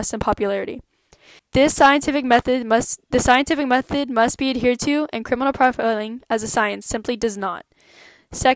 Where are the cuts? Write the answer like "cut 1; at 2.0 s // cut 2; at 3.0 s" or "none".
cut 1; at 1.4 s